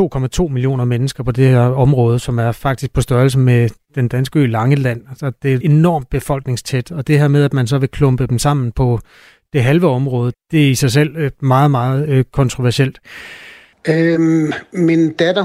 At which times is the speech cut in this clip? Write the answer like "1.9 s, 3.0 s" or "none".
5.6 s, 10.3 s, 13.7 s